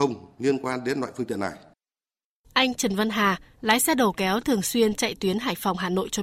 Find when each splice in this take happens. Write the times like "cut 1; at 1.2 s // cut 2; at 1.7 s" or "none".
none

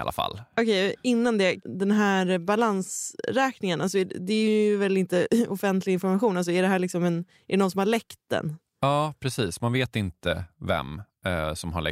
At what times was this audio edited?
none

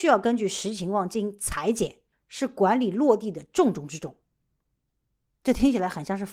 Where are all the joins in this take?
cut 1; at 2.1 s

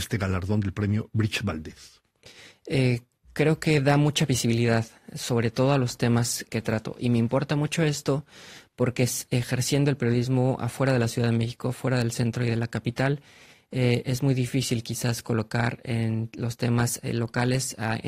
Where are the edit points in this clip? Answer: cut 1; at 6.5 s

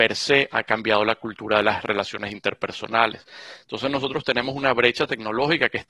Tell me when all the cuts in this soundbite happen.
none

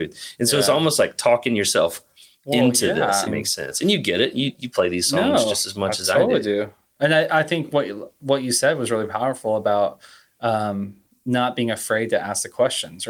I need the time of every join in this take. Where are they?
cut 1; at 3.3 s

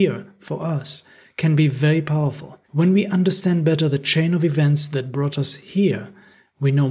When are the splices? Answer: cut 1; at 2.6 s

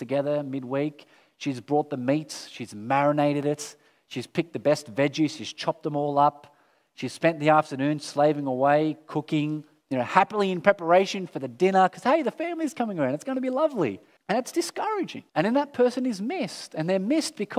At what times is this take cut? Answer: cut 1; at 14.2 s // cut 2; at 15.3 s

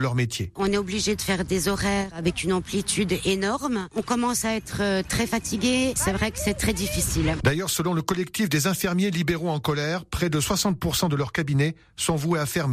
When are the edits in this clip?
none

